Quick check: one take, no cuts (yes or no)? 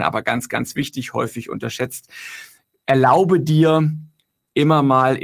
yes